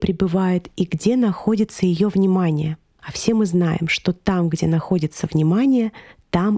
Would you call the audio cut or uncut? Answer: uncut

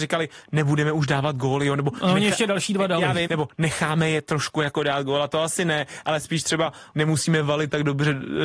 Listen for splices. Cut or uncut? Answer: cut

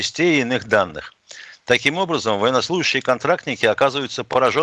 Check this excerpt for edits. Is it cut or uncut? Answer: uncut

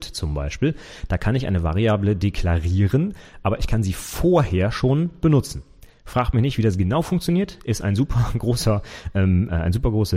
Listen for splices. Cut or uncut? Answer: uncut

